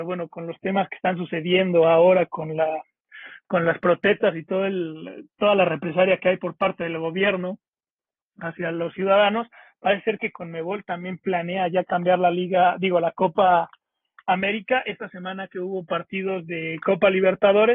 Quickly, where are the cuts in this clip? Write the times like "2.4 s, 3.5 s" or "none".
none